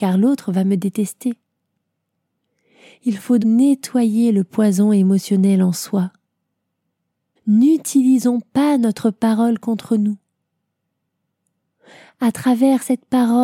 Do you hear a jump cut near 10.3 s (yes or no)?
no